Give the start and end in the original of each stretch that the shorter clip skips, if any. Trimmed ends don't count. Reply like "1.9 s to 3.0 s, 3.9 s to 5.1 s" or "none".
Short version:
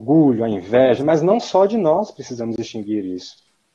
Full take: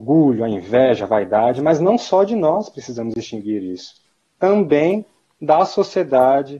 1.0 s to 1.5 s

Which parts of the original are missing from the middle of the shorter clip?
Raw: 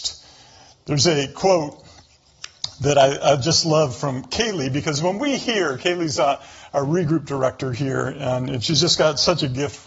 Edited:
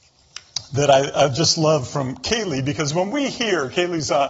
none

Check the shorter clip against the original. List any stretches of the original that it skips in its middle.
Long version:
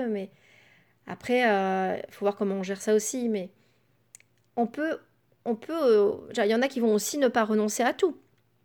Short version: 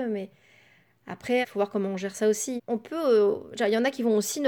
1.4 s to 2.1 s, 3.2 s to 5.3 s

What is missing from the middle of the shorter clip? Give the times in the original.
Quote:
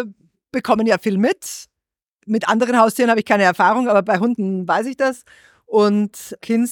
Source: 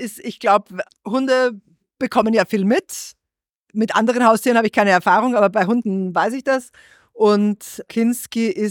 none

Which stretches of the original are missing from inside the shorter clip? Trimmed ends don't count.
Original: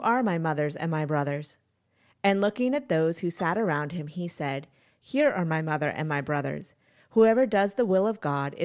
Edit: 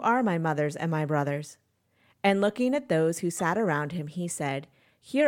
none

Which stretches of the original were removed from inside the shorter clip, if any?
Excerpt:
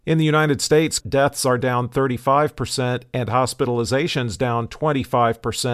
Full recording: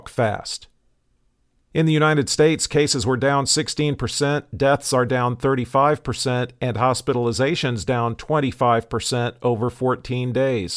2.7 s to 4.5 s

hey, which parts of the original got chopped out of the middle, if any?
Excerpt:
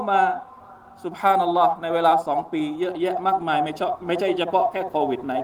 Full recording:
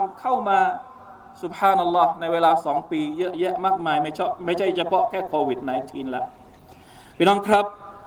none

